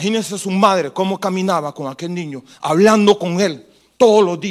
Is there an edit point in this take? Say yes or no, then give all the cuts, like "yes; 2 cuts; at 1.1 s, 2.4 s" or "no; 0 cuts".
no; 0 cuts